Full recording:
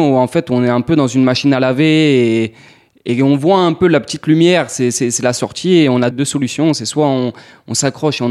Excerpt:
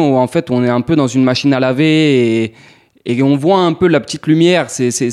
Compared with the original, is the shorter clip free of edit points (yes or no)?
yes